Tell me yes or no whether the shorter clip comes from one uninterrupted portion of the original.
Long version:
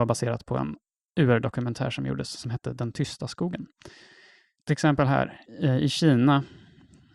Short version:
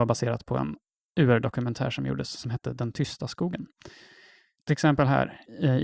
yes